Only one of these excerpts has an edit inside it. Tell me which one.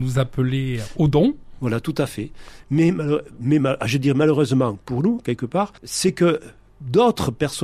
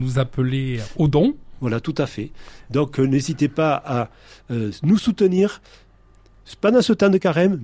first; 2 cuts; at 2.6 s, 5.8 s

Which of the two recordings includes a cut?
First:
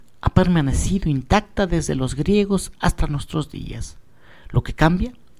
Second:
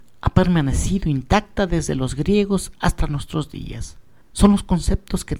second; 1 cut; at 4.2 s

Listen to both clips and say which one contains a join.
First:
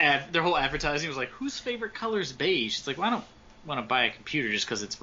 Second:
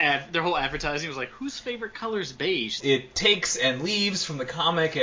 second; 1 cut; at 2.8 s

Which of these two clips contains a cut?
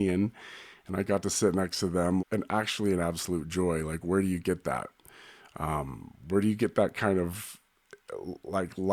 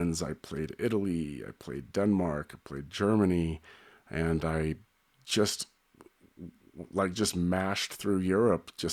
first; 1 cut; at 2.2 s

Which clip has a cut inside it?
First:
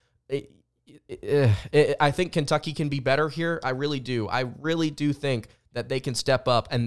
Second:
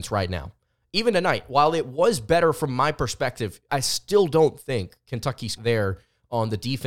second; 2 cuts; at 3.7 s, 5.6 s

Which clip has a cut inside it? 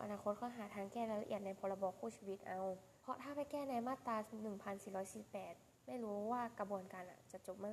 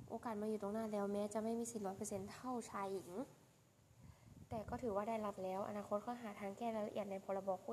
first; 1 cut; at 3.0 s

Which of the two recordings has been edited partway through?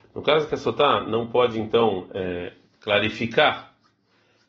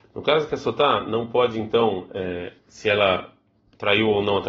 second; 1 cut; at 2.6 s

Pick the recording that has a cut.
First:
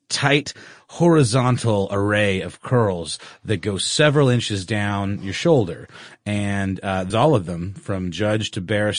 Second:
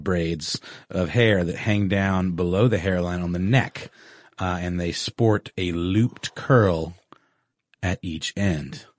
first; 1 cut; at 7.1 s

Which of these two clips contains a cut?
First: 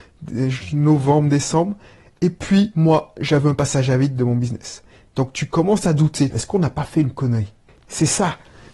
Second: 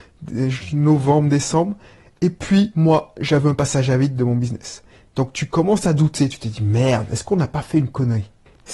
first; 1 cut; at 6.3 s

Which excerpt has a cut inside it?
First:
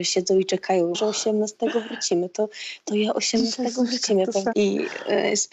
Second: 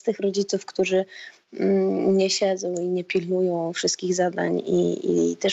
first; 2 cuts; at 0.9 s, 4.5 s

